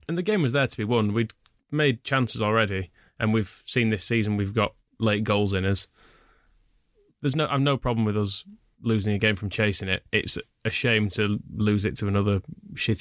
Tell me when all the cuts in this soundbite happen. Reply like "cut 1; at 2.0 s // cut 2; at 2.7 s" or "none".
none